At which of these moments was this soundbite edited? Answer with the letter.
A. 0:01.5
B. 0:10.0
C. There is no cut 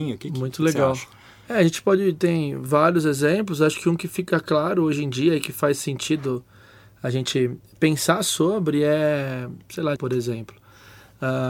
B